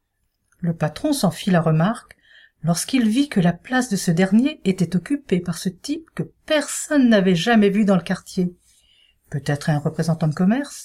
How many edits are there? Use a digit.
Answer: 0